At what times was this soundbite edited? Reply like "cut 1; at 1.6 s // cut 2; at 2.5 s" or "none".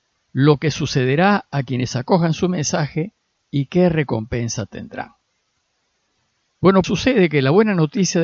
cut 1; at 6.8 s